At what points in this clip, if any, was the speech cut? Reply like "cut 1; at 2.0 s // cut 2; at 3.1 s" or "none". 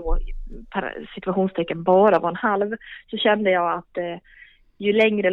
none